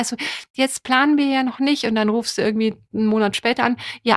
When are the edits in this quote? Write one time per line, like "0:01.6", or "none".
none